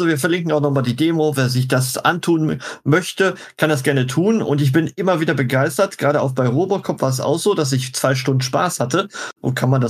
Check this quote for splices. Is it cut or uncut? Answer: uncut